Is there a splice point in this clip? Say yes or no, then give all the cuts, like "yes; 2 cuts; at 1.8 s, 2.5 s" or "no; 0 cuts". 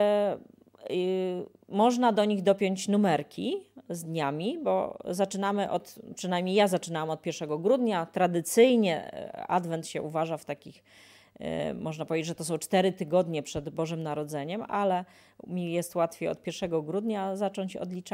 no; 0 cuts